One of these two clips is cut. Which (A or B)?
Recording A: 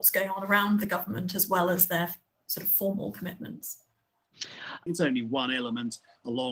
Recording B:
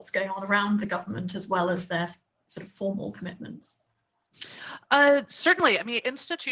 A